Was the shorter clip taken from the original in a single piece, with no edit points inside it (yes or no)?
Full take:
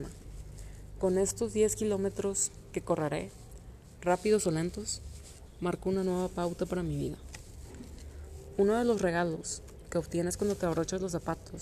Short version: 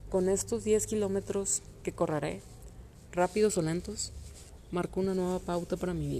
yes